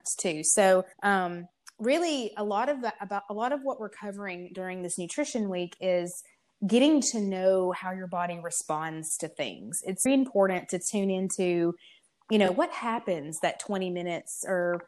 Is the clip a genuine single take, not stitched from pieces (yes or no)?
no